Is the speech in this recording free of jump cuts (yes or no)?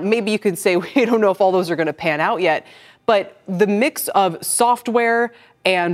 yes